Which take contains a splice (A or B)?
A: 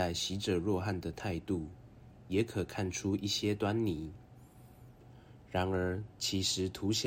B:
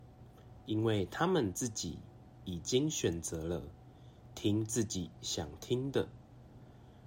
A